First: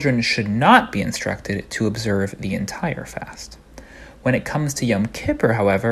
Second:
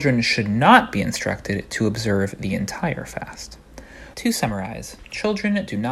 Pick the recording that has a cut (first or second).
second